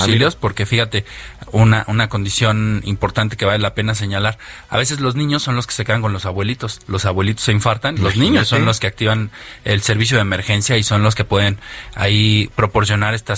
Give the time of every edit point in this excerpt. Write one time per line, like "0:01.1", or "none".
0:08.0